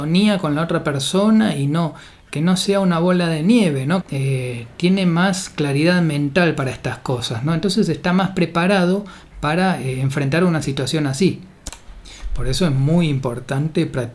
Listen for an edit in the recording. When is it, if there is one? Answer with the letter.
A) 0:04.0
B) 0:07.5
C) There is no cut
A